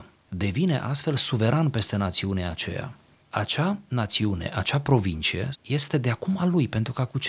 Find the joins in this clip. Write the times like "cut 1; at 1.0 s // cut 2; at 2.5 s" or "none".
cut 1; at 5.5 s